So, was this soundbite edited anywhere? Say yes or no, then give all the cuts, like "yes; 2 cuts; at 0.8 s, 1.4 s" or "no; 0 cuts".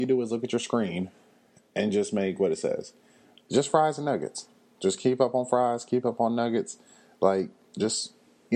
no; 0 cuts